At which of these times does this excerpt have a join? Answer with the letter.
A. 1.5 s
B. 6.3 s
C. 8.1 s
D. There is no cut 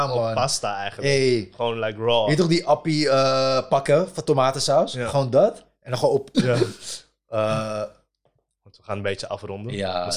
B